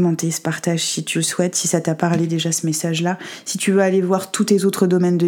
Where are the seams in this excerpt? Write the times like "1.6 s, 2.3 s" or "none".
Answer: none